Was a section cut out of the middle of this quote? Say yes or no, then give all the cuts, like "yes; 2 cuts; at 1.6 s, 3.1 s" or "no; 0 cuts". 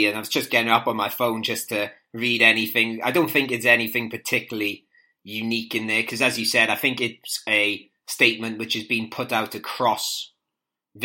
no; 0 cuts